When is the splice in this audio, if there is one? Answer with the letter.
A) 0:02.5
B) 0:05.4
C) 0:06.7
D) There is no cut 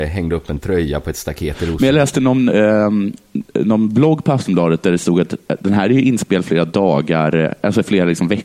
A